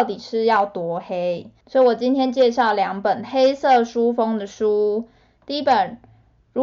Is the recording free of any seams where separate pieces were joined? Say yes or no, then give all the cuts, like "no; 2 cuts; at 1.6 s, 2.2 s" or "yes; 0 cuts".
no; 1 cut; at 1.6 s